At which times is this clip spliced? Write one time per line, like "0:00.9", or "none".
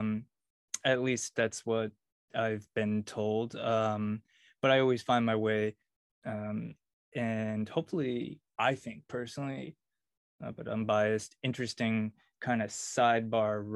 0:06.1